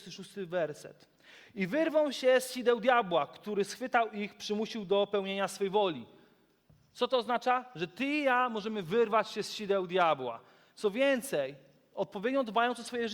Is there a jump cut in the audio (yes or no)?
no